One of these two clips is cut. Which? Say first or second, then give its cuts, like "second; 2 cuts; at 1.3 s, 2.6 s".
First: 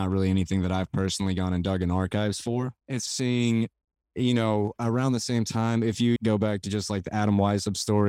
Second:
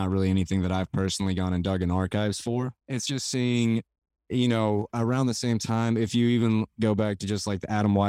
first; 2 cuts; at 3.1 s, 6.2 s